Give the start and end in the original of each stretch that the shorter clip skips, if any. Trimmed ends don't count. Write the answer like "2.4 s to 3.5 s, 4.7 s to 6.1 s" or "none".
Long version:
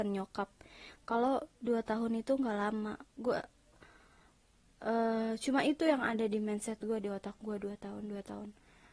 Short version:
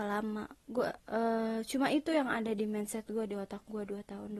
3.5 s to 4.7 s

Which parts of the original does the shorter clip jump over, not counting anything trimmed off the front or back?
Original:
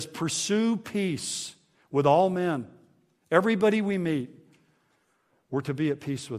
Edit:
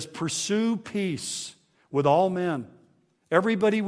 none

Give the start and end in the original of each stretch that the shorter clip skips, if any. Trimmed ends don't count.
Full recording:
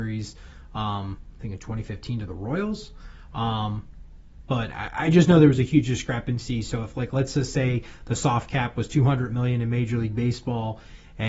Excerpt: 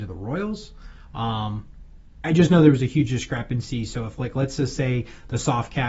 4.4 s to 5.0 s

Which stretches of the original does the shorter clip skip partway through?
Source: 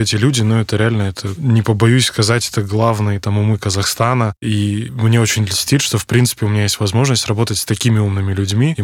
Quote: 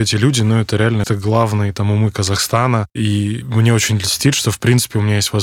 1.0 s to 2.5 s

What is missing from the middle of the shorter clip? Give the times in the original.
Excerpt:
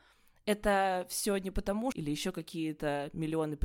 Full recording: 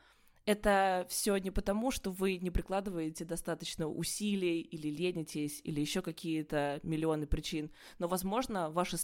1.9 s to 5.6 s

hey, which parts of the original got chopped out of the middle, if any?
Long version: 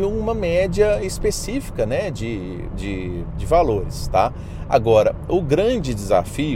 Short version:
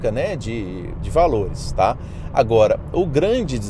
2.7 s to 3.3 s

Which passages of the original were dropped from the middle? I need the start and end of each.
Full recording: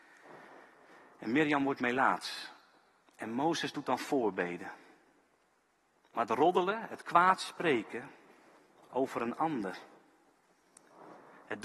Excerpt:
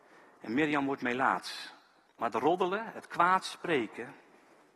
2.9 s to 6.0 s

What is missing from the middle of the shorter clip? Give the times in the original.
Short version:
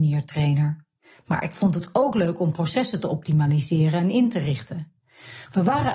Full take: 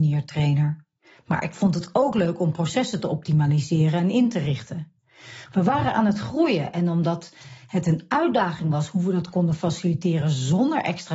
none

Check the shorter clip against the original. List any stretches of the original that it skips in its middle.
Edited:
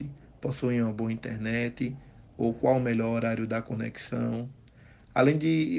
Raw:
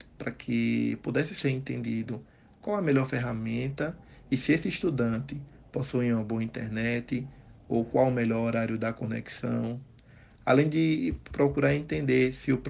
none

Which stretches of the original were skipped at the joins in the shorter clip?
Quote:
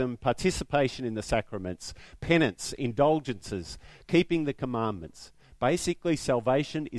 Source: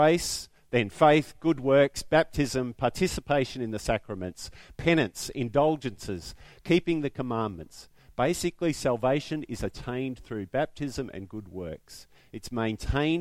none

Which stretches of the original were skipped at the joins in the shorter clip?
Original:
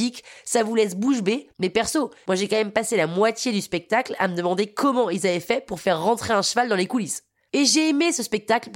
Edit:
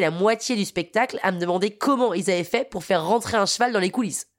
none

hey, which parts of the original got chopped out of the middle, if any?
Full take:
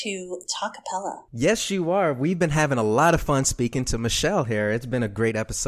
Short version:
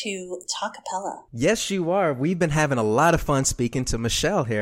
none

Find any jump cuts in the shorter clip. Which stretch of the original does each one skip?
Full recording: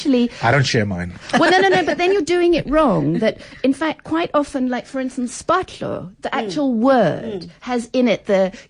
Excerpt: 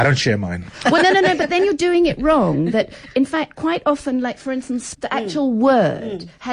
5.4 s to 6.2 s

